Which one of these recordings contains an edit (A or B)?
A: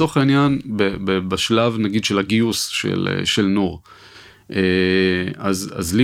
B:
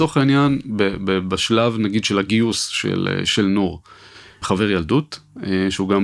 B